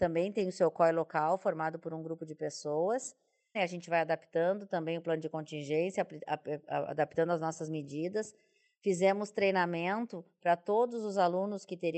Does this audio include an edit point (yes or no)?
yes